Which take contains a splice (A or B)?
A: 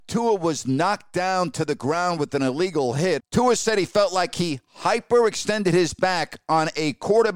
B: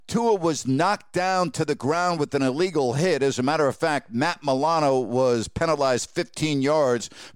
A